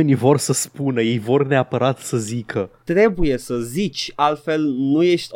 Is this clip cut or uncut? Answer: uncut